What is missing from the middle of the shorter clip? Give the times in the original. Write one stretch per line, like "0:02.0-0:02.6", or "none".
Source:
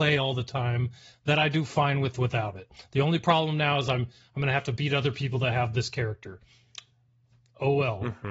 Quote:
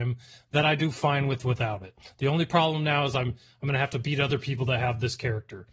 none